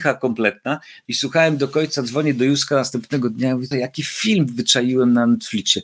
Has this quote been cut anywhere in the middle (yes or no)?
yes